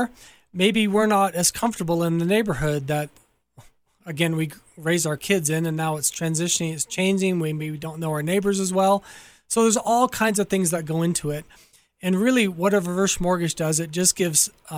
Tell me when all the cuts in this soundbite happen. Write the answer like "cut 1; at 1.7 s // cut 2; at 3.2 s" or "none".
none